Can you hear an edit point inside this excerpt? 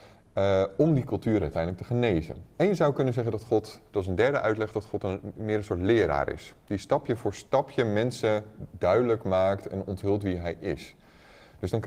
no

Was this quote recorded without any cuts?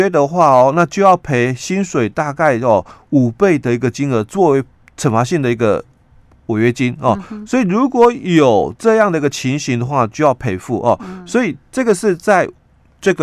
yes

